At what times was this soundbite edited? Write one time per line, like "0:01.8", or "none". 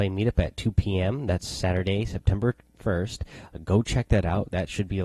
none